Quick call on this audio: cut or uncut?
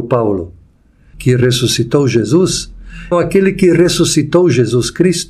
cut